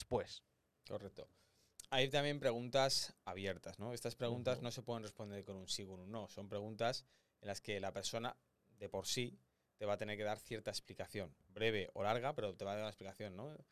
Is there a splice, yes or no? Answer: no